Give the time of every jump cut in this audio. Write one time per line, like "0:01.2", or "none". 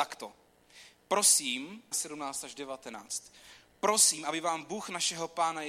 0:01.9